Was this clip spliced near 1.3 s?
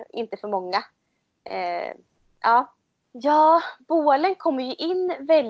no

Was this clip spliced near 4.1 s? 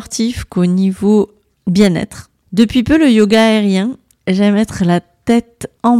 yes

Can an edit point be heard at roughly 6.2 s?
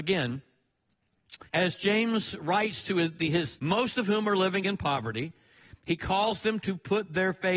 no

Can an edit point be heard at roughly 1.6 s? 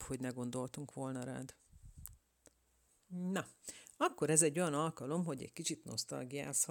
no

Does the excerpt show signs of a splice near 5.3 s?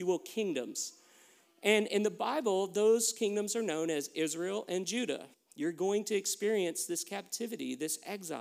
yes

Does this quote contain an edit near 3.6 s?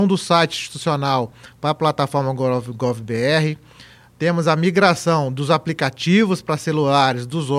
no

